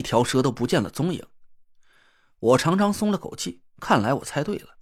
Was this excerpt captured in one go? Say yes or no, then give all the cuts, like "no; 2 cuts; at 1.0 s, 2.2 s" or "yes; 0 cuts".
yes; 0 cuts